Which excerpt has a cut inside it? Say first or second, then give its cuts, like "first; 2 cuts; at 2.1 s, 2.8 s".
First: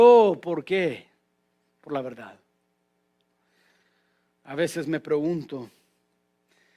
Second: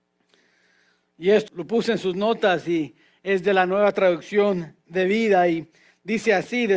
second; 1 cut; at 1.5 s